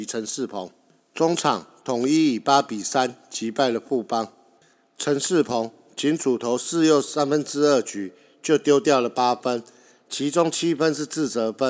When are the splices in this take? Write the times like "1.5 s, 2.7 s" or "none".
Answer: none

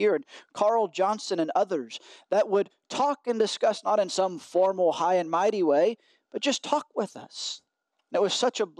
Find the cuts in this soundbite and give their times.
none

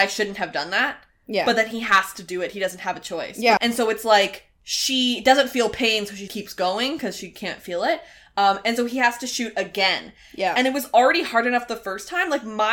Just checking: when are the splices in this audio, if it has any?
3.6 s, 6.3 s

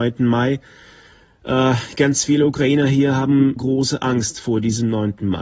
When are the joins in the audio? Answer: 3.6 s

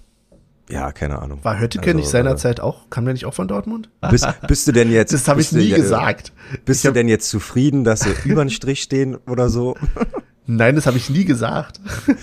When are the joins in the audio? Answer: 4.0 s

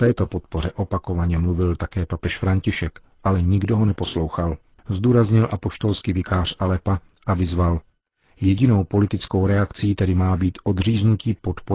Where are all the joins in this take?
none

